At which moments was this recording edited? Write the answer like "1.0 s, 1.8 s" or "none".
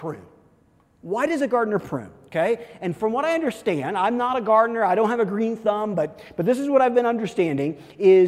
none